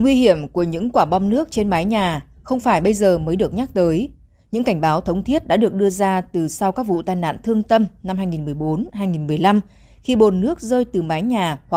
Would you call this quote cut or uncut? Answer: uncut